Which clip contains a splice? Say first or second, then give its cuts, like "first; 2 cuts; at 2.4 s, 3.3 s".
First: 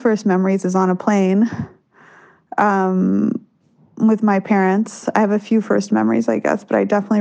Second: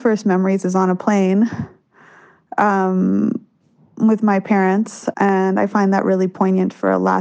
second; 1 cut; at 5.1 s